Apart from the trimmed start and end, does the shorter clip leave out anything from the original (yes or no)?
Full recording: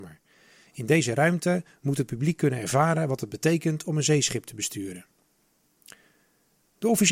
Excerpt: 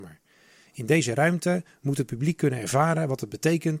no